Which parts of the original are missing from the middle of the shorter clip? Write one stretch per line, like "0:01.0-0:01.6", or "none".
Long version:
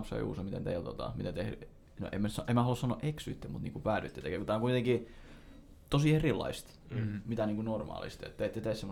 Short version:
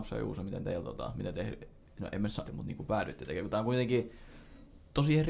0:02.4-0:03.4